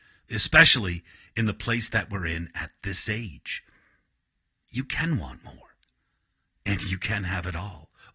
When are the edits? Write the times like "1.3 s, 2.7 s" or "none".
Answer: none